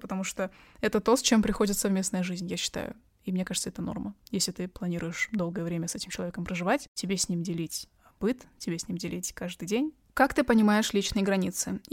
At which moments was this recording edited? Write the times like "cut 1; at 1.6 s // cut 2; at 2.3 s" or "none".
cut 1; at 10.1 s